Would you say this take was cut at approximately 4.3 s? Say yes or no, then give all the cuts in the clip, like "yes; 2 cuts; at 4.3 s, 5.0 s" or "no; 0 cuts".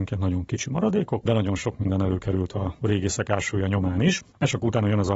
no; 0 cuts